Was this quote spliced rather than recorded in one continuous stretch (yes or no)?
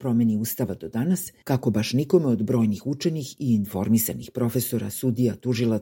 yes